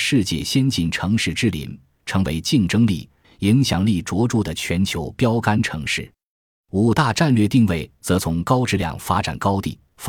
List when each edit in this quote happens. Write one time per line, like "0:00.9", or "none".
0:03.2